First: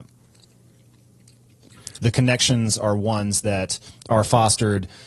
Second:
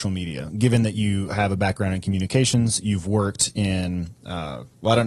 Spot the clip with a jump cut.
first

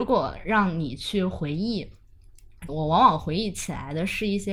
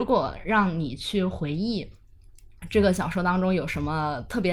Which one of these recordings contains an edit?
first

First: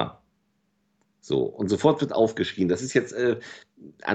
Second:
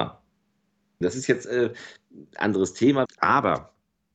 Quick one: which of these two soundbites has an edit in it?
second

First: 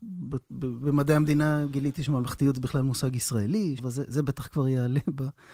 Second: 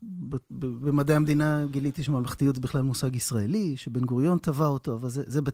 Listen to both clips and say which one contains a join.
first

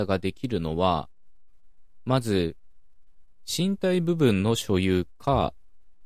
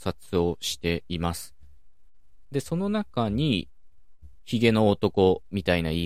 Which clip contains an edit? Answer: second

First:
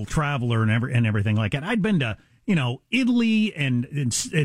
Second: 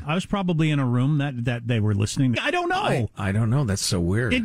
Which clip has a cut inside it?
second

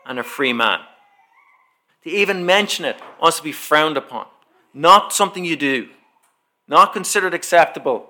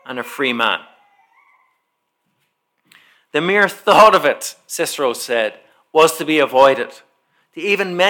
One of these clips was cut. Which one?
first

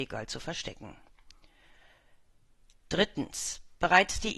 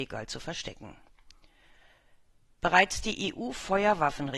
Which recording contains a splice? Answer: second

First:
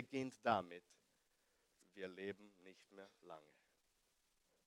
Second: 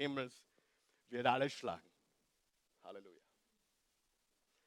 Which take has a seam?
first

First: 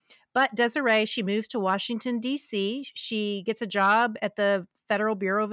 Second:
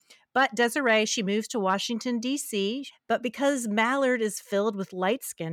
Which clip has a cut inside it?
second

